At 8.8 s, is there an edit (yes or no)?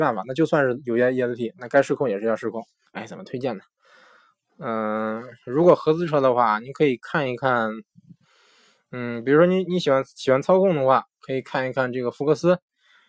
no